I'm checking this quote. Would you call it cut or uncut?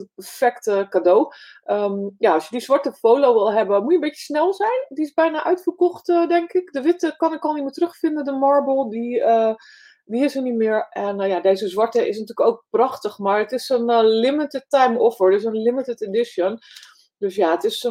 uncut